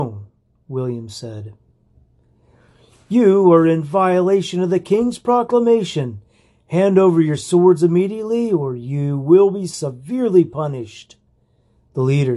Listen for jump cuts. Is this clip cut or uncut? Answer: uncut